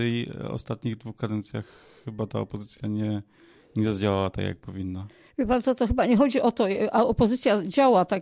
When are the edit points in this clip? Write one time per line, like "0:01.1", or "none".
none